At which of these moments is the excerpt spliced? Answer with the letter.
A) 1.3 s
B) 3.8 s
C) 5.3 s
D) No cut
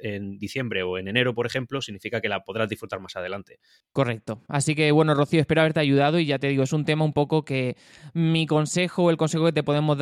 B